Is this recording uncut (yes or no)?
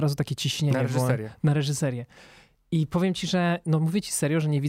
yes